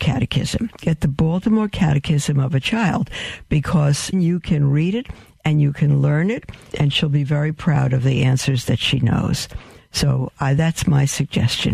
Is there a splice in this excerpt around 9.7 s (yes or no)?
no